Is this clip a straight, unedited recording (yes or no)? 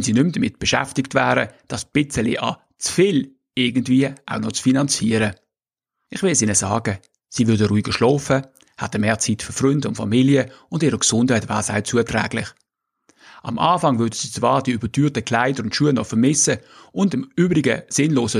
yes